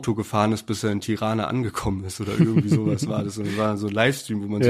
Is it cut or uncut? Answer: uncut